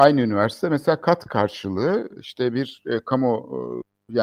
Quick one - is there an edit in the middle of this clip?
no; 0 cuts

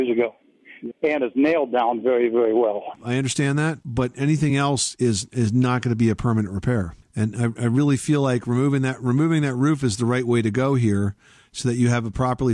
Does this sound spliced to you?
yes; 1 cut; at 0.9 s

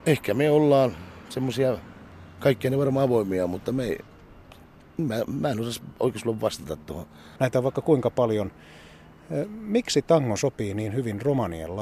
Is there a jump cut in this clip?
yes; 1 cut; at 7.4 s

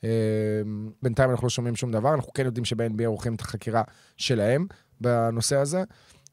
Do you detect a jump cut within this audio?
yes; 1 cut; at 1.0 s

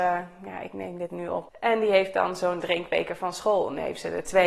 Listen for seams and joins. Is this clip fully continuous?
no; 1 cut; at 1.5 s

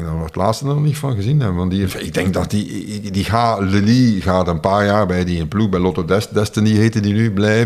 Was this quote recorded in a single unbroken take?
no; 1 cut; at 1.9 s

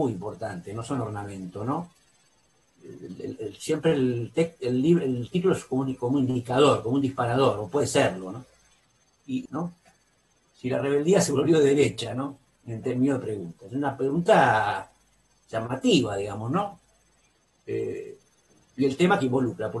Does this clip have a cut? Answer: yes; 1 cut; at 9.5 s

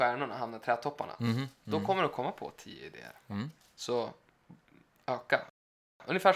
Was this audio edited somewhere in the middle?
no; 0 cuts

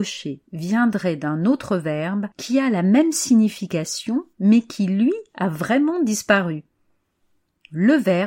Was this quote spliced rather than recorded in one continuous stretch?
yes; 1 cut; at 2.3 s

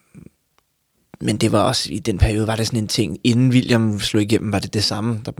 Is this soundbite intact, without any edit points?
yes; 0 cuts

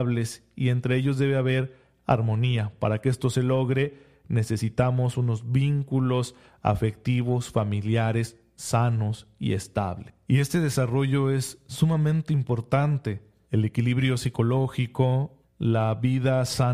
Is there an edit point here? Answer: yes; 3 cuts; at 10.2 s, 13.4 s, 15.4 s

